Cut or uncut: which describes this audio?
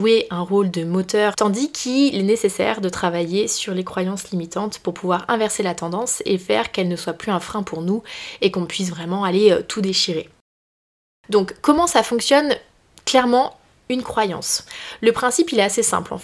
cut